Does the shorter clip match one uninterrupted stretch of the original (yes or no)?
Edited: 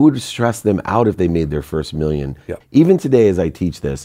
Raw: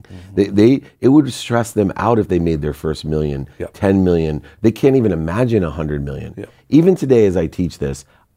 no